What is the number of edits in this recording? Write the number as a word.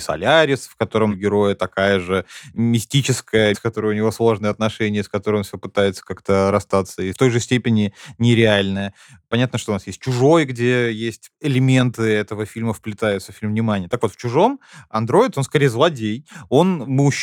one